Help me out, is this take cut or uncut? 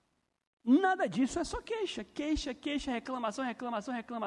uncut